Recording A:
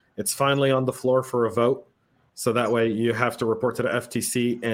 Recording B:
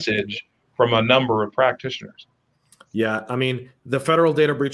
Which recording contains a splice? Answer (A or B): A